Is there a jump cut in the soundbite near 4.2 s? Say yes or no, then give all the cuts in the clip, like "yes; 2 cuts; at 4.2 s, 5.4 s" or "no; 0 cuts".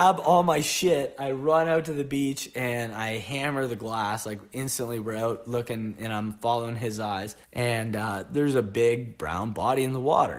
no; 1 cut; at 7.4 s